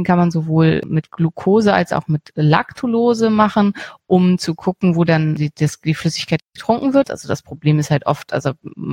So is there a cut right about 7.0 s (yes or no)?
yes